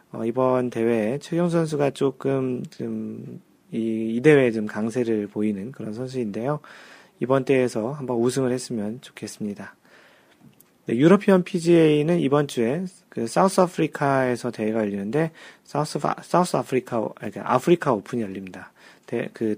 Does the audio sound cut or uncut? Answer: uncut